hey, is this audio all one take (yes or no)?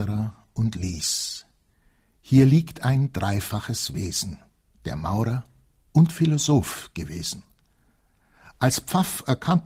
no